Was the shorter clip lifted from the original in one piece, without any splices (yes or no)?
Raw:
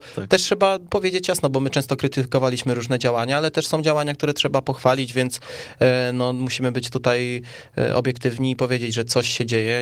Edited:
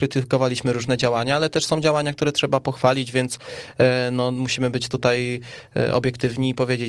yes